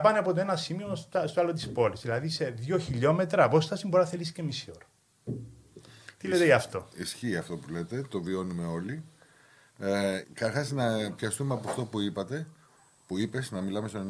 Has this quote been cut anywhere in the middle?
yes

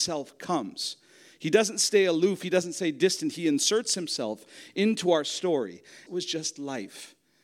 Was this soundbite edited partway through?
yes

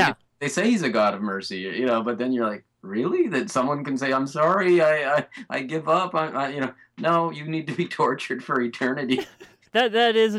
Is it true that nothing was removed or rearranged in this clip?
yes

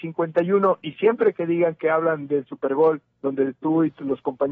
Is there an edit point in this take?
yes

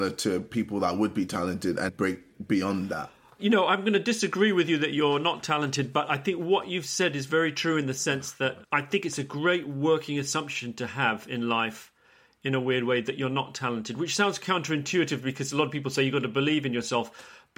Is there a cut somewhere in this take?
yes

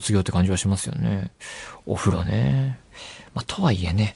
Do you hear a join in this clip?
no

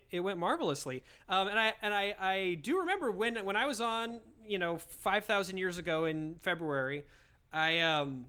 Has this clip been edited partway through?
no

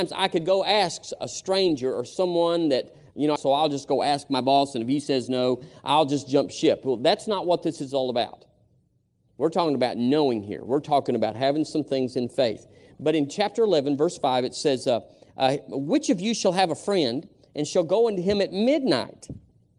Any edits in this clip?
yes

